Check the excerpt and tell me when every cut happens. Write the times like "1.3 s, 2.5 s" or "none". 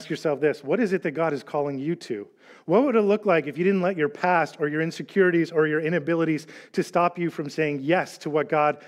none